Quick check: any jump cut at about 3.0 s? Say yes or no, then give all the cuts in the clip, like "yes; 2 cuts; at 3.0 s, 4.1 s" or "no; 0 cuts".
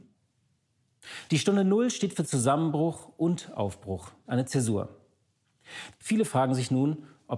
no; 3 cuts; at 1.3 s, 4.2 s, 5.9 s